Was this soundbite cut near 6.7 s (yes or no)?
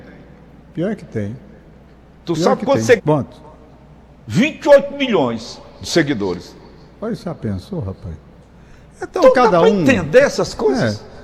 no